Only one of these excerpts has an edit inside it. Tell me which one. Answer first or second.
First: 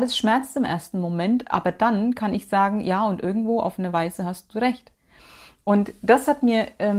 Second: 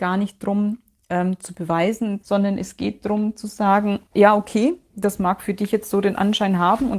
second